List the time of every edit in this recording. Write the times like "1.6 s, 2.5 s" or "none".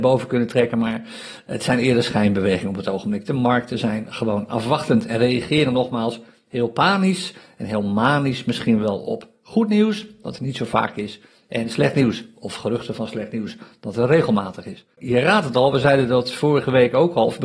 15.0 s